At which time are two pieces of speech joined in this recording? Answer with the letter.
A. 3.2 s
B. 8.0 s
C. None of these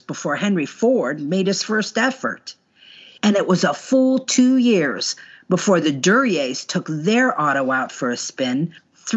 A